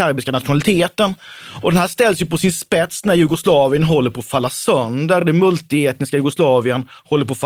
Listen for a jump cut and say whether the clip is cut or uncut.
uncut